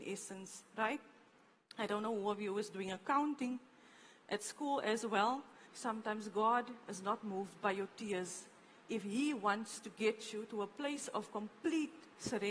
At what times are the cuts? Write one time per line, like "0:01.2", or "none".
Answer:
0:05.7